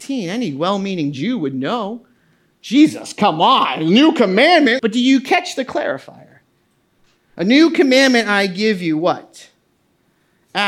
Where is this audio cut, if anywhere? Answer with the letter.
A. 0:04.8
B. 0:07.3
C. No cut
A